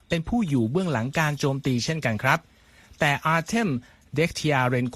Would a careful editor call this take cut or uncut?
uncut